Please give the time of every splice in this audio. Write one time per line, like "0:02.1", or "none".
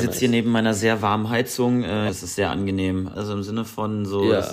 0:02.1
0:03.1